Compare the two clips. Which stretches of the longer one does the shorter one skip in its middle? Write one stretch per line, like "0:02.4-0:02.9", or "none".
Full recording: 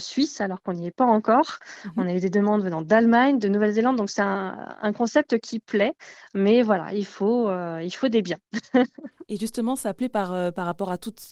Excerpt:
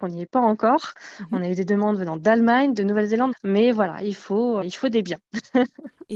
0:04.0-0:06.2
0:07.5-0:07.8